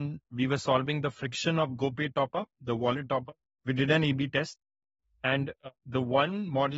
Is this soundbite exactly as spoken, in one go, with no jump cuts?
no; 2 cuts; at 3.4 s, 5.8 s

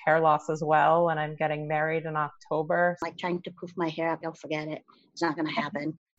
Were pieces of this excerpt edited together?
yes; 1 cut; at 4.2 s

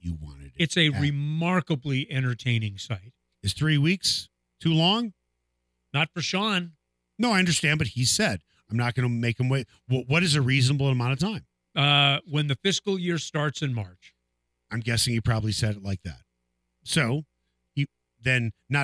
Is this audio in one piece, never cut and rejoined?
no; 2 cuts; at 3.3 s, 17.7 s

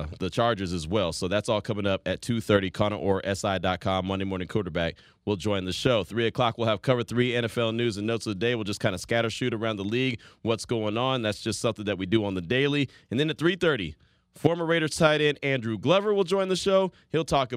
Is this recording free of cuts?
yes; 0 cuts

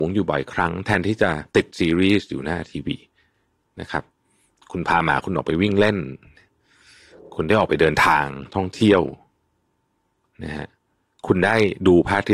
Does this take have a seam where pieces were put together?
no; 0 cuts

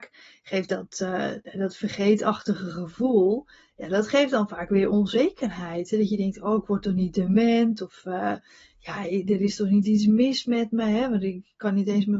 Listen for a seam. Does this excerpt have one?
no; 0 cuts

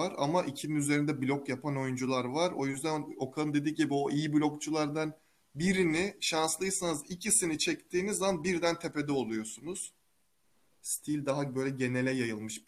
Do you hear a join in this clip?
no; 0 cuts

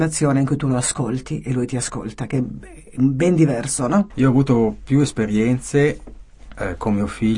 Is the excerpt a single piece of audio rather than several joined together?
no; 1 cut; at 4.1 s

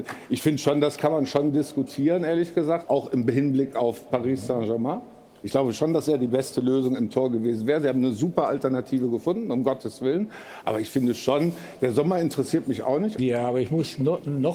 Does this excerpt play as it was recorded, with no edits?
no; 2 cuts; at 2.8 s, 13.2 s

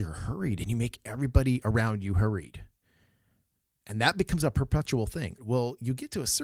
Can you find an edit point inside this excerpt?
yes; 2 cuts; at 3.8 s, 5.4 s

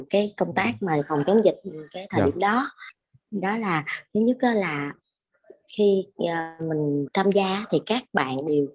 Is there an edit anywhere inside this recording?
no; 0 cuts

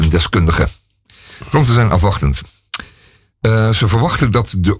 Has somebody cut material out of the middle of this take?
no; 0 cuts

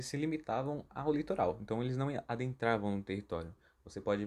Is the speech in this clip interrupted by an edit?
no; 0 cuts

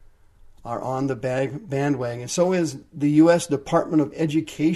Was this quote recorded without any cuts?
yes; 0 cuts

